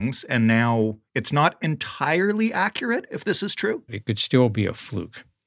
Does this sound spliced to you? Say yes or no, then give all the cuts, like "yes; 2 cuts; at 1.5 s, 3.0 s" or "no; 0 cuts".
yes; 2 cuts; at 1.1 s, 3.9 s